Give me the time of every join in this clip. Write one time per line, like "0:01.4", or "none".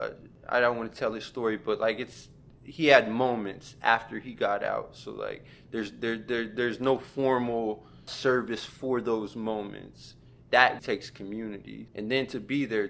0:10.8
0:11.9